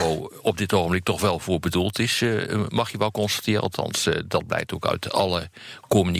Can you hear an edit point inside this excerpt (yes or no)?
no